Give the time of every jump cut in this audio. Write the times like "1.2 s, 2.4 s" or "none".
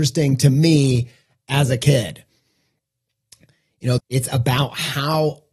4.0 s